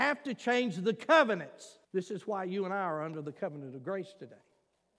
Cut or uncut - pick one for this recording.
cut